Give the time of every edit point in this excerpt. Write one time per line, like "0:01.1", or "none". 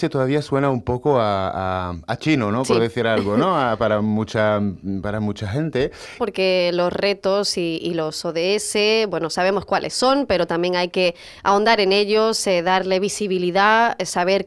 0:06.2